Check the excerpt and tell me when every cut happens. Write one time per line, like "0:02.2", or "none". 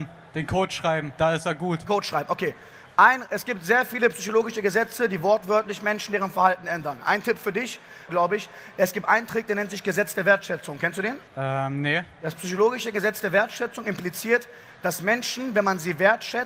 0:01.2
0:08.1
0:11.3